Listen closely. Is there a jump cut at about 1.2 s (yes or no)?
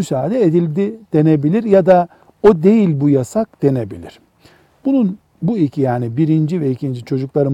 no